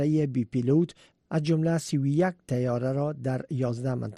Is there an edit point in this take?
no; 0 cuts

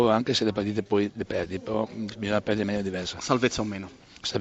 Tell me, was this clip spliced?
no; 0 cuts

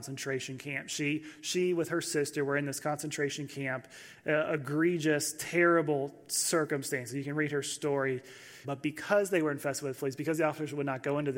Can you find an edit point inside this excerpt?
yes; 1 cut; at 8.6 s

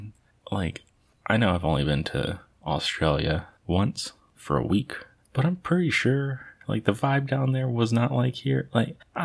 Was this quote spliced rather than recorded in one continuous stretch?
no; 0 cuts

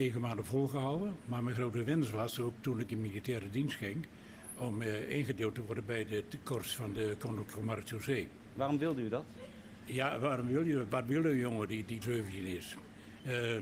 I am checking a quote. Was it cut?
yes; 1 cut; at 12.0 s

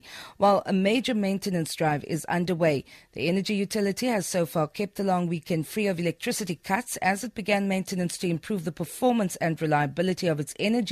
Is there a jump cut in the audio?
no; 0 cuts

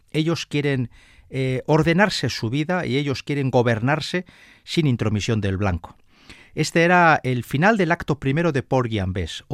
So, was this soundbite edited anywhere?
no; 0 cuts

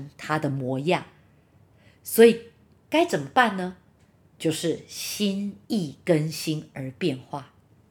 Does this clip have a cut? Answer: no; 0 cuts

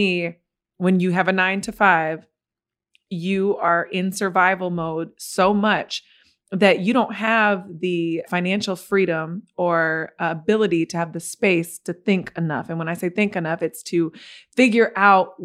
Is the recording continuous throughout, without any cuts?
no; 1 cut; at 8.3 s

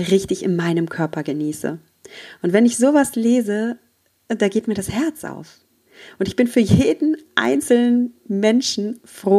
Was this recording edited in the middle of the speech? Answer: no; 0 cuts

